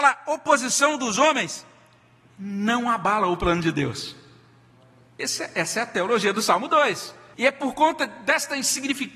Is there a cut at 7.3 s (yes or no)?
yes